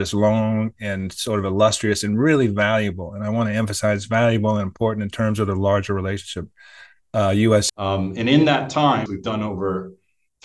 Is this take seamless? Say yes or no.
no